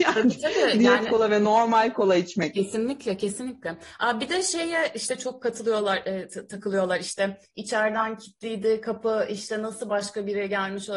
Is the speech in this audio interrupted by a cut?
no; 0 cuts

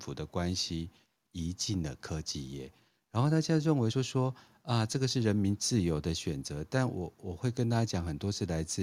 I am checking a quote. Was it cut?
no; 0 cuts

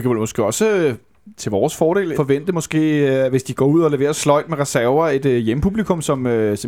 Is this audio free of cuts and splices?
no; 1 cut; at 2.1 s

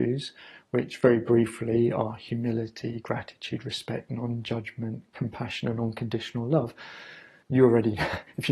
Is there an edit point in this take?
yes; 1 cut; at 7.4 s

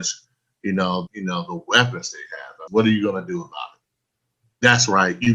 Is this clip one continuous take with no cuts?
no; 2 cuts; at 1.1 s, 2.7 s

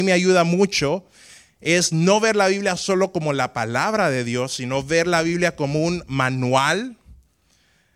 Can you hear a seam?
no; 0 cuts

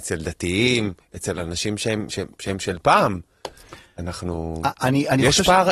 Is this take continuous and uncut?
yes; 0 cuts

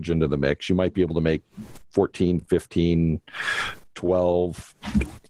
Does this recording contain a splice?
no; 0 cuts

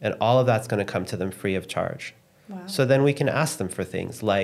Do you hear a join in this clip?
no; 0 cuts

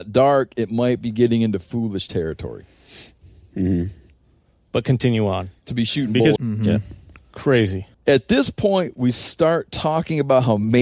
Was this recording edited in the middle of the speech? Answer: yes; 2 cuts; at 6.4 s, 7.9 s

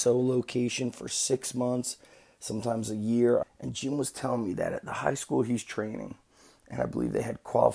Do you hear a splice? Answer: yes; 1 cut; at 3.4 s

